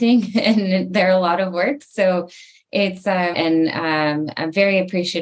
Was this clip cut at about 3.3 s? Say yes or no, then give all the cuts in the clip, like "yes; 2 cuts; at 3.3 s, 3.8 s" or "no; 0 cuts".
yes; 1 cut; at 3.3 s